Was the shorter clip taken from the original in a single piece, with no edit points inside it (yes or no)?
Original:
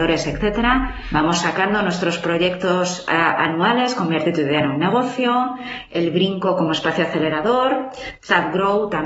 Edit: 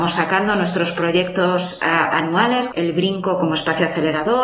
no